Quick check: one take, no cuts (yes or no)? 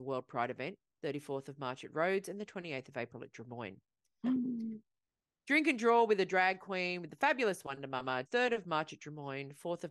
no